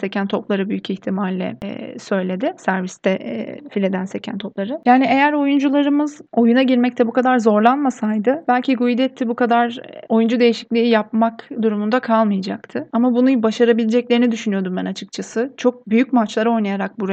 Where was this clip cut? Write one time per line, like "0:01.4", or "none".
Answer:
0:12.9